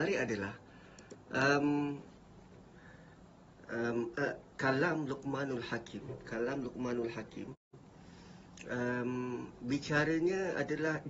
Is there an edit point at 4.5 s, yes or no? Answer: yes